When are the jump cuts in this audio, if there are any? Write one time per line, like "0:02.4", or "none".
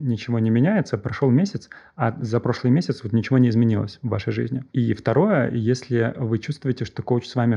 none